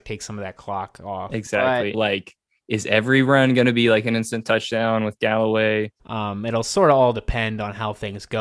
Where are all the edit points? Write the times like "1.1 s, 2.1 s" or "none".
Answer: 1.9 s, 6.0 s